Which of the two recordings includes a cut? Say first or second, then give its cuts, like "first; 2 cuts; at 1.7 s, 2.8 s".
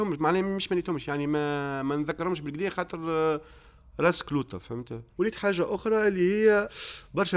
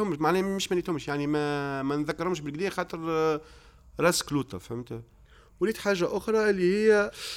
first; 1 cut; at 5.1 s